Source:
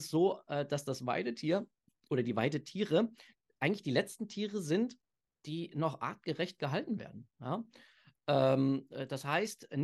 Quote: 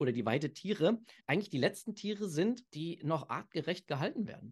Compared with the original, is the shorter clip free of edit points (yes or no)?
no